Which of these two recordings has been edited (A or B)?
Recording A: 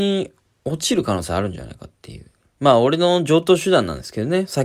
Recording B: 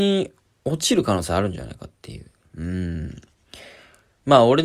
A